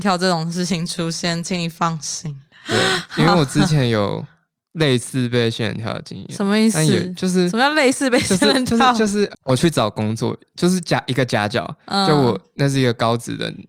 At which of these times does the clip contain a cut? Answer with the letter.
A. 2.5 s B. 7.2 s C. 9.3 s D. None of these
C